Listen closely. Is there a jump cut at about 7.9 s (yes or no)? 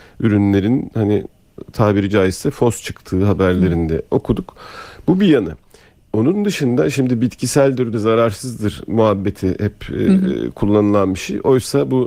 yes